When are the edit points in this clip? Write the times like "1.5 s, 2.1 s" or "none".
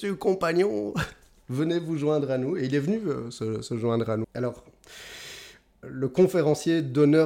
4.2 s, 5.8 s